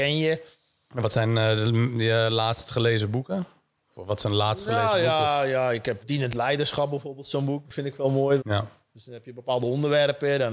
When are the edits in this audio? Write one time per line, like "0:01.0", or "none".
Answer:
0:06.0
0:08.4